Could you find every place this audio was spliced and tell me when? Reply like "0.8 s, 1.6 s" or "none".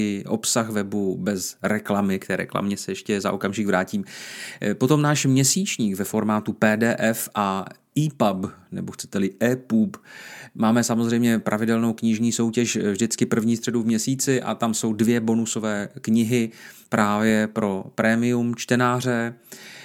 none